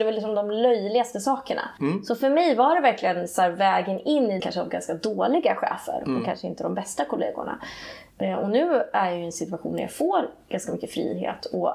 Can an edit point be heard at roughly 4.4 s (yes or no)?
yes